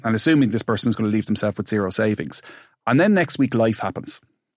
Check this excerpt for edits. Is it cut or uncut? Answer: uncut